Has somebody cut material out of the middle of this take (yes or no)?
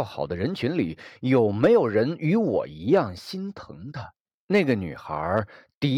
yes